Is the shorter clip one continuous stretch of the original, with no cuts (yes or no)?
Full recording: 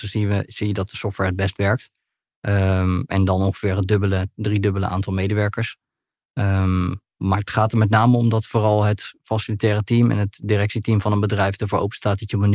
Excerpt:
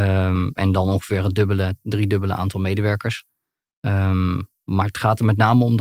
yes